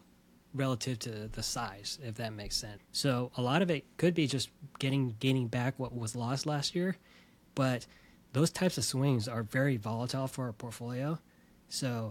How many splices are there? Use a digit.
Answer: 1